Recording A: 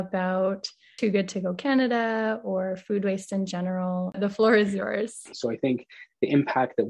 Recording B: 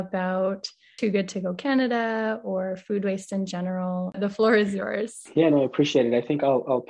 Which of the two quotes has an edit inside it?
A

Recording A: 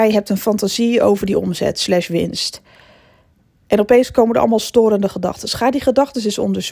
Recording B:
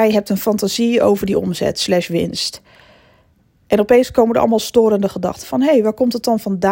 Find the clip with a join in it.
B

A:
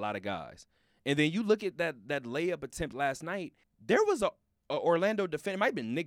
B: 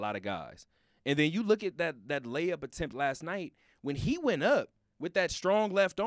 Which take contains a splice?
A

